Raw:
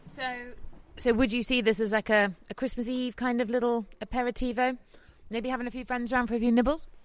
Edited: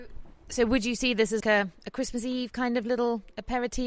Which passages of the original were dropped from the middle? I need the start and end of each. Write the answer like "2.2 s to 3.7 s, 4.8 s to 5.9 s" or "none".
1.9 s to 2.0 s